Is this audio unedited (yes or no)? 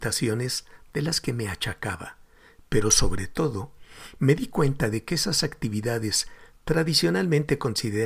yes